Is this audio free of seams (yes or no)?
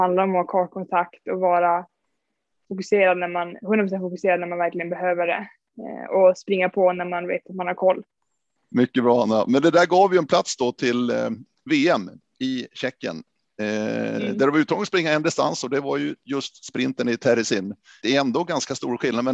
no